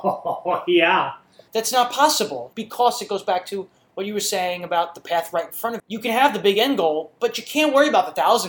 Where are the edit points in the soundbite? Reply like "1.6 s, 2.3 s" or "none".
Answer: 1.5 s, 5.8 s